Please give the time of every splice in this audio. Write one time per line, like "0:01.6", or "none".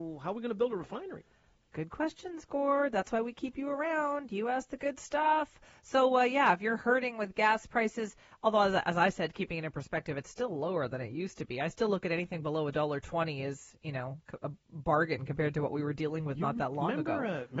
none